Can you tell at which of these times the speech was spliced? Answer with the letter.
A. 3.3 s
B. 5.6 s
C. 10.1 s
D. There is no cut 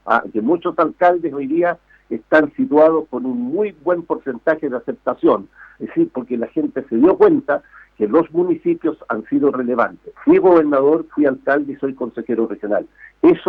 C